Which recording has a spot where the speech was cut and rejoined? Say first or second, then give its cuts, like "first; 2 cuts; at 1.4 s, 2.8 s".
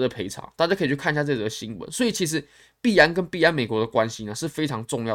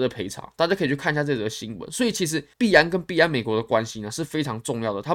second; 1 cut; at 2.5 s